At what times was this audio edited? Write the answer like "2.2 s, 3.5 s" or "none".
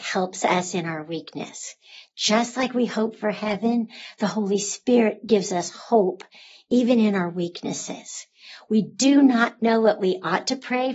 none